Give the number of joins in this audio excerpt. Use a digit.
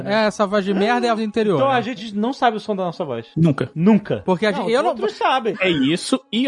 3